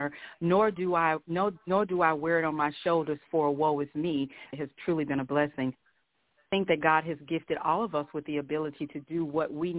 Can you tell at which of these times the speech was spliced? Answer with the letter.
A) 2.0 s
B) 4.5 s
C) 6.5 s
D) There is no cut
B